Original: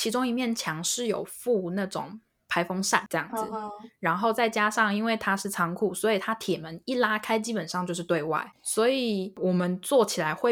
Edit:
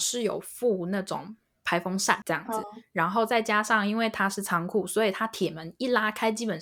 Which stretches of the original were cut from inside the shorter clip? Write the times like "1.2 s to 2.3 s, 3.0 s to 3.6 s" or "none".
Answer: 3.5 s to 3.7 s